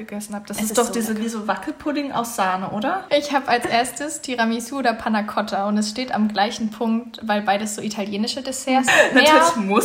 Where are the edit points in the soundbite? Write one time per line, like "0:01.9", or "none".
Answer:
0:03.1
0:08.9